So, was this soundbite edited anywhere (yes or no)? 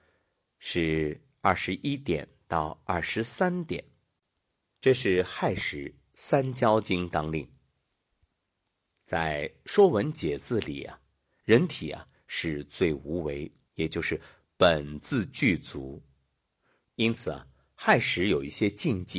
yes